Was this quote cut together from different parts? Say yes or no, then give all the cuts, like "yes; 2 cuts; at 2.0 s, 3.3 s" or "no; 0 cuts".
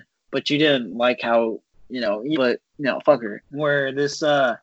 yes; 2 cuts; at 2.3 s, 3.4 s